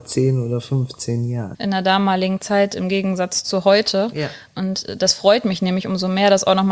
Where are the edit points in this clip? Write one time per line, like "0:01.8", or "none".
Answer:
0:01.5